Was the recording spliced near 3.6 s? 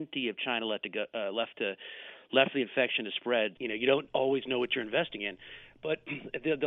yes; 1 cut; at 3.6 s

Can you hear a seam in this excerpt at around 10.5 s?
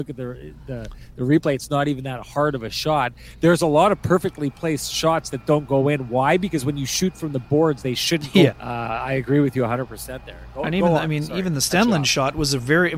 no; 1 cut; at 8.5 s

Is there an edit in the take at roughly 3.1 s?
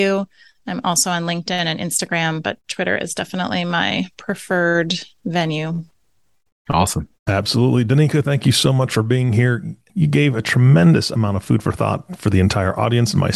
no; 1 cut; at 7.2 s

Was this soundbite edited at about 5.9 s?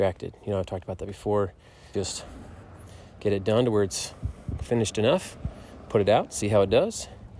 no; 1 cut; at 1.9 s

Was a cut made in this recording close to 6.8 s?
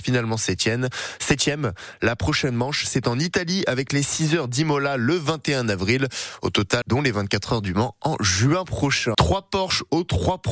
yes; 2 cuts; at 6.8 s, 9.1 s

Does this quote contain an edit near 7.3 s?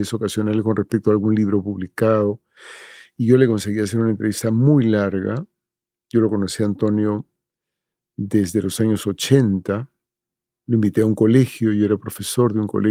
no; 0 cuts

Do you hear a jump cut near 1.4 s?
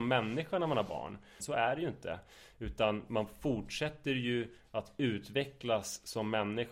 yes; 1 cut; at 1.4 s

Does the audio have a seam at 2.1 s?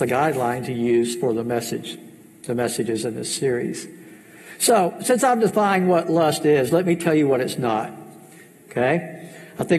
no; 0 cuts

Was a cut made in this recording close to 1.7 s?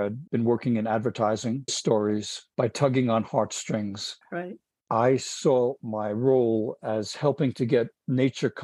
yes; 1 cut; at 1.7 s

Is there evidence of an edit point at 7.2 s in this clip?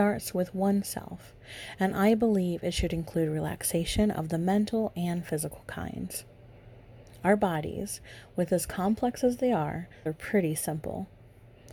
no; 1 cut; at 10.1 s

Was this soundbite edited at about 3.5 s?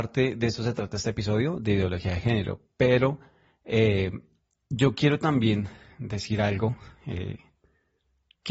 no; 0 cuts

